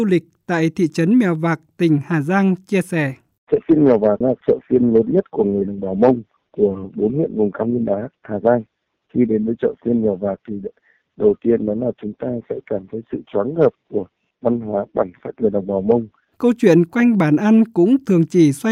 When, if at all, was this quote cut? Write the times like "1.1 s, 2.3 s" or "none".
16.3 s

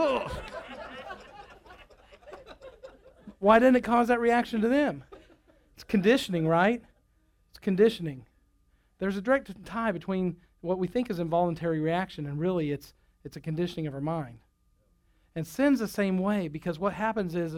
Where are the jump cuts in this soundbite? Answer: none

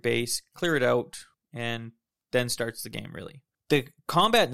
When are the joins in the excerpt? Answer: none

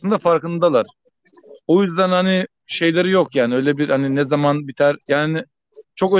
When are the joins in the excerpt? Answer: 5.0 s

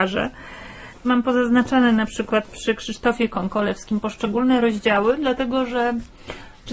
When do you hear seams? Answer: none

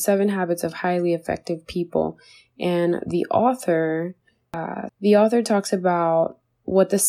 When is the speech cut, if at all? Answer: 4.9 s

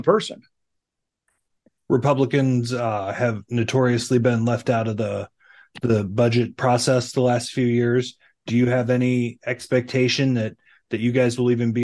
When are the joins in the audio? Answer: none

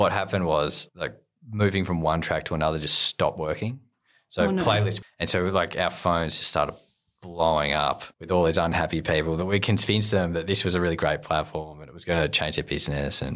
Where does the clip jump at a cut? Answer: 5.0 s, 8.1 s

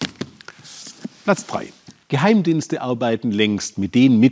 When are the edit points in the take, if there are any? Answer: 2.0 s

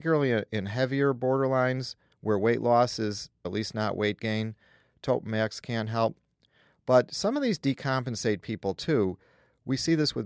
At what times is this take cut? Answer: 3.4 s

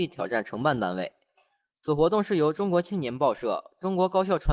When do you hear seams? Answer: none

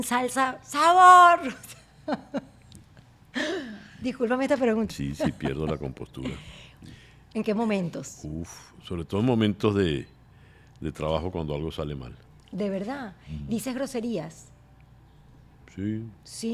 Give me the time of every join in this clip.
4.9 s

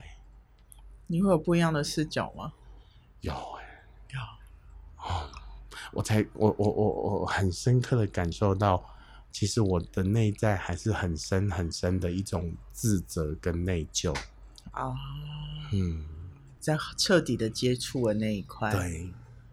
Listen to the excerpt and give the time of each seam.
none

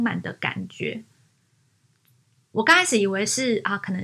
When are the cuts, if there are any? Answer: none

